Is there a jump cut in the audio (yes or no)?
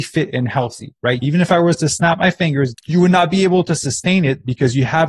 yes